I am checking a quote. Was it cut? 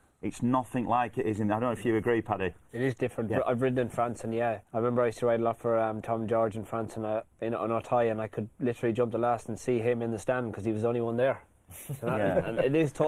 yes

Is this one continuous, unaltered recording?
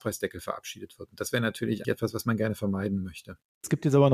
no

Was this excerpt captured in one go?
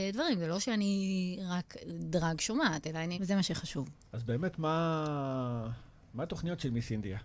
no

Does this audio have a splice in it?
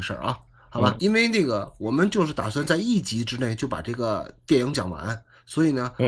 yes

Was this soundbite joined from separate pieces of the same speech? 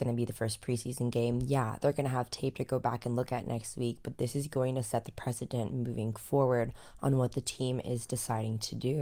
no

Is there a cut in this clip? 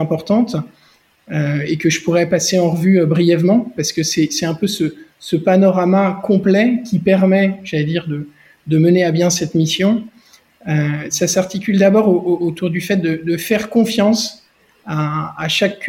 no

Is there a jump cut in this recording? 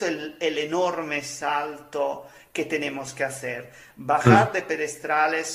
no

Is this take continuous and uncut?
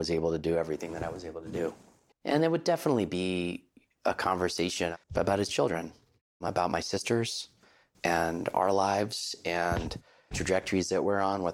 no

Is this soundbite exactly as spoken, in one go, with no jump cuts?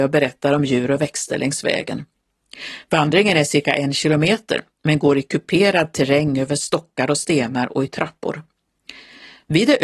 yes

